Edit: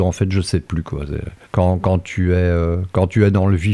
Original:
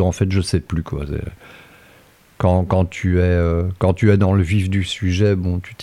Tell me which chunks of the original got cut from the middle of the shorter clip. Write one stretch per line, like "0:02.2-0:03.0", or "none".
0:01.4-0:02.3